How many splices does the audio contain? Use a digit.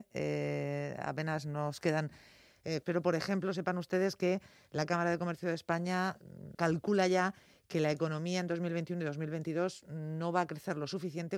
2